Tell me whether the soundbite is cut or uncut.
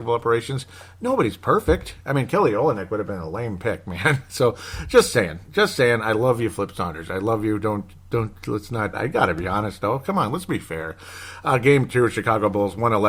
cut